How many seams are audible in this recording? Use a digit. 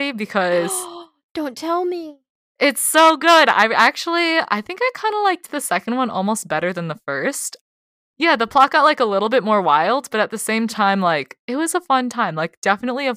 1